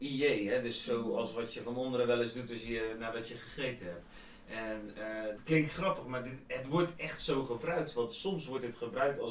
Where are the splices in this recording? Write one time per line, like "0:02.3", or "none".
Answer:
0:05.4